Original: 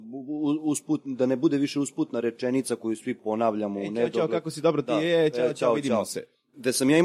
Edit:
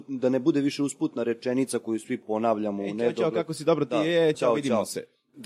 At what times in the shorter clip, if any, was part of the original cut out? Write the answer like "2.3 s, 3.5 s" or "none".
4.3 s

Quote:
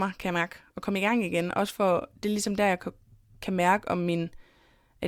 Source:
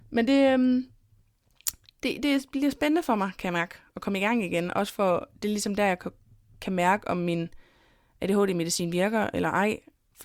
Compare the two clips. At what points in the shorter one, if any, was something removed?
none

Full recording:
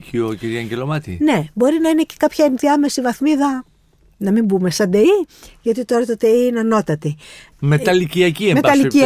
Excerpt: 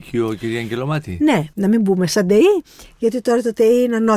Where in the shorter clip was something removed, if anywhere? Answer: 1.5 s

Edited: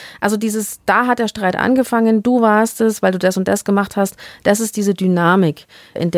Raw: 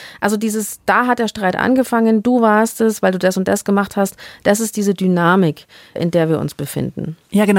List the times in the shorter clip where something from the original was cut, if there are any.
none

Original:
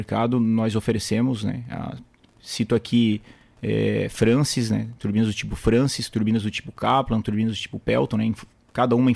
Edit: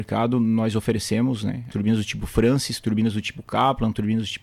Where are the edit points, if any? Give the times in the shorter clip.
1.7 s

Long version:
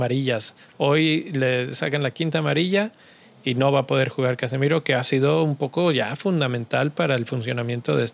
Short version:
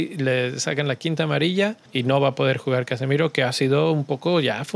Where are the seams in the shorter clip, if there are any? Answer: 1.9 s

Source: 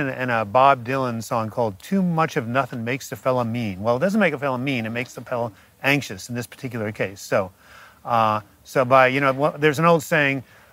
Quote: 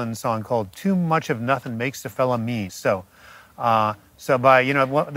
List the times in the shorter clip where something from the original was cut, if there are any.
2.7 s

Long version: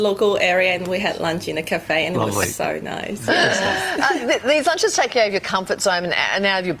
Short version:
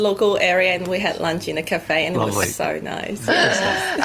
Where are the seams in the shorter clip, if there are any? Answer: none

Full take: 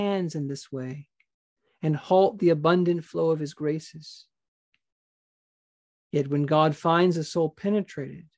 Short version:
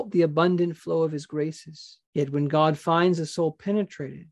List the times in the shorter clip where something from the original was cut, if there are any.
2.0 s

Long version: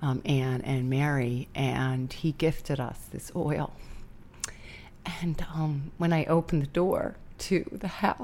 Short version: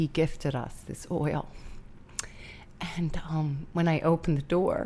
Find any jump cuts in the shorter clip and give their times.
none

